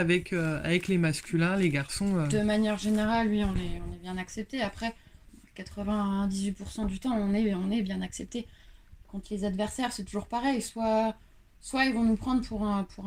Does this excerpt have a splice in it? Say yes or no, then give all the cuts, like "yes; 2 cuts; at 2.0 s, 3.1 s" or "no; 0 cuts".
no; 0 cuts